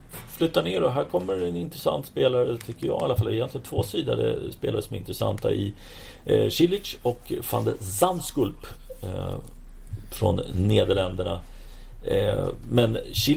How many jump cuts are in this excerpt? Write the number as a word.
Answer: zero